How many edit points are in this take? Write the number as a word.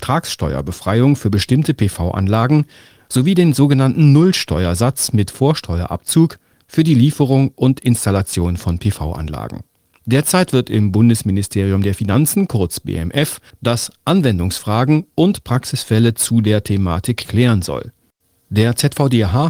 one